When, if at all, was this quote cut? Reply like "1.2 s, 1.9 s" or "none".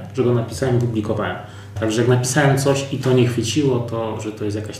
1.8 s